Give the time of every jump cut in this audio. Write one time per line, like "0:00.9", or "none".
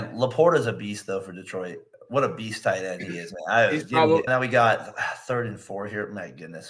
0:04.3